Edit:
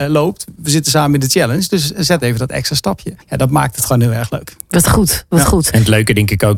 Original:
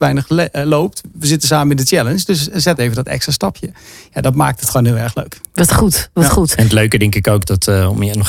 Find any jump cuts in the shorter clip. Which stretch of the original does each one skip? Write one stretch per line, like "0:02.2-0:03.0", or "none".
0:03.8-0:04.1